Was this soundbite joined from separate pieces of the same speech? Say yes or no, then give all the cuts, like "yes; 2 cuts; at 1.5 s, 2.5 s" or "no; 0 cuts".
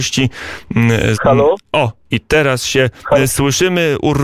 yes; 1 cut; at 1.1 s